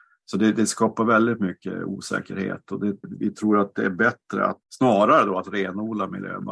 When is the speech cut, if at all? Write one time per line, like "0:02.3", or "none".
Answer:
0:03.0
0:04.7